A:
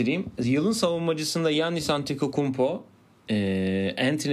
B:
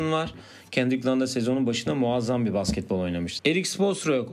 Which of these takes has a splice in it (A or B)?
B